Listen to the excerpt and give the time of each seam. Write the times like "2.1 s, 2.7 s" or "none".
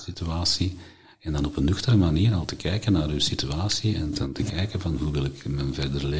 1.1 s